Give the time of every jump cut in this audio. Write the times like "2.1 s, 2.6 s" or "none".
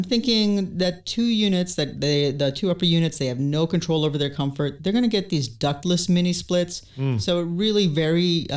none